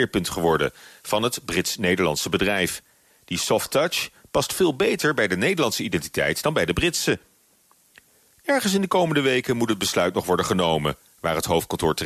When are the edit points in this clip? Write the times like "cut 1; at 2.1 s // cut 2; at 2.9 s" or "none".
none